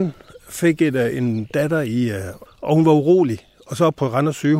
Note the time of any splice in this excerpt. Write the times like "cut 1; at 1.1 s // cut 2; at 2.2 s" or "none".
cut 1; at 2.5 s